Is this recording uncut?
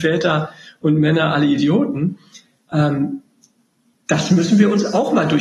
yes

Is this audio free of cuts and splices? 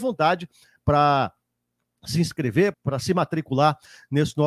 no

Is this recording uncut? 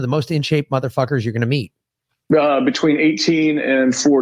no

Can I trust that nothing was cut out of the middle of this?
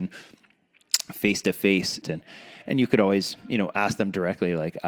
no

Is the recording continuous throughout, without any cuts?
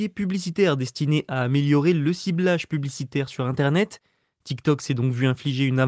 yes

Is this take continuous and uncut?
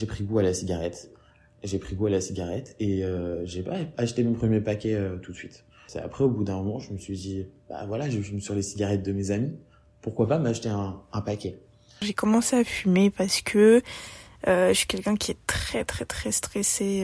yes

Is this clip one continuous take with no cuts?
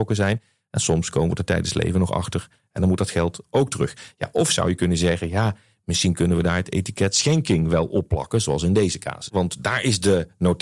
no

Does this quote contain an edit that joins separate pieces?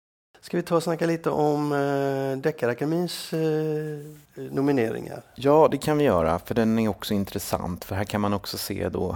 yes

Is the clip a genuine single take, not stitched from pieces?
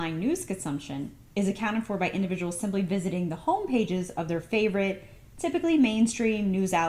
yes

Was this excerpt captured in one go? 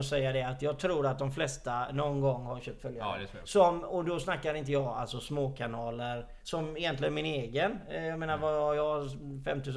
yes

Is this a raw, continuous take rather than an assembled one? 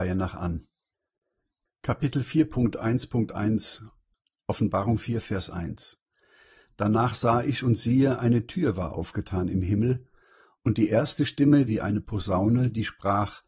no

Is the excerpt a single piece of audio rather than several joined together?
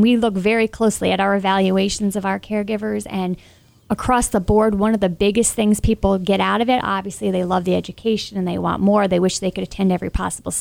yes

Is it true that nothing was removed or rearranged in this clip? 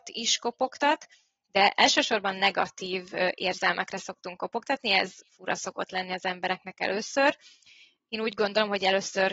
yes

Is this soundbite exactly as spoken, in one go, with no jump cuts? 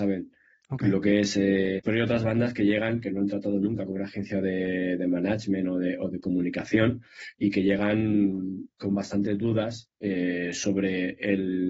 no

